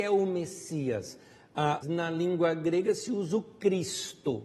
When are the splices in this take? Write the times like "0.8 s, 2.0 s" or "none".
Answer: 1.8 s